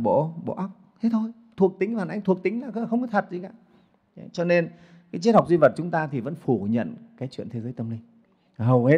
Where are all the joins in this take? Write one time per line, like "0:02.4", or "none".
none